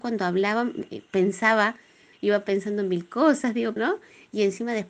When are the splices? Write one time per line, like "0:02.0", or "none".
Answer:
0:03.8

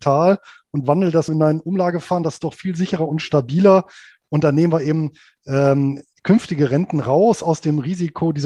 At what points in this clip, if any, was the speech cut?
0:01.3

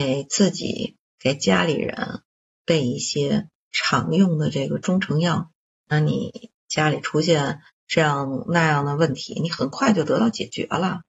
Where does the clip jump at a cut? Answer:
none

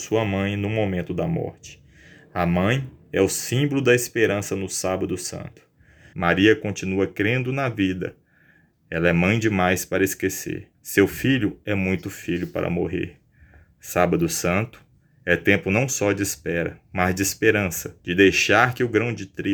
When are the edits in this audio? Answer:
0:06.1
0:10.7
0:18.0

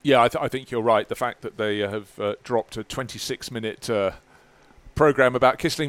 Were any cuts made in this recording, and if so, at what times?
none

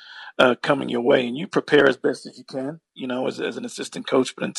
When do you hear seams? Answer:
none

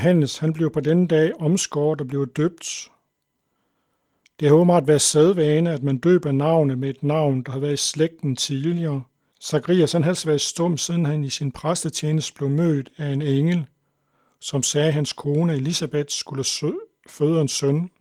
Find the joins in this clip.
0:09.3

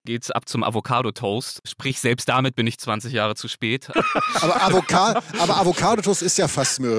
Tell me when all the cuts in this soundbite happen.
0:03.9

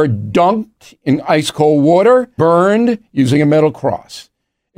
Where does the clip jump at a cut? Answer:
0:02.4

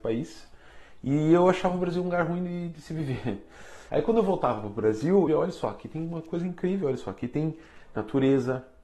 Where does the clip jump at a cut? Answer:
0:03.9
0:05.3

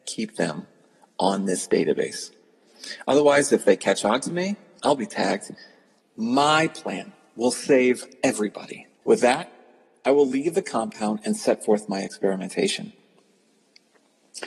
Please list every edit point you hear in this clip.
0:06.0
0:09.0

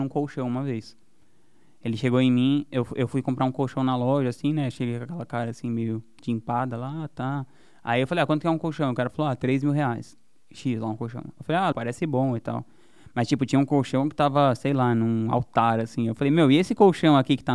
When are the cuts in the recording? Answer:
0:11.7

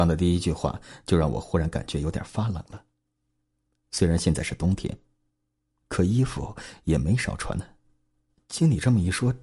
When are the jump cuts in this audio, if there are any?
0:08.3

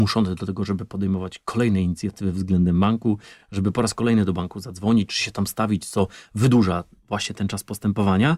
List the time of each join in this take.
none

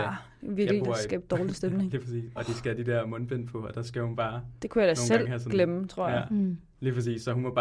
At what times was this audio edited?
0:02.4

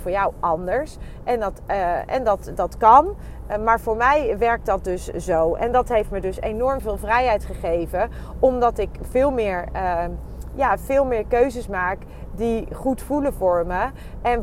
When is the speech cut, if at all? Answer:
none

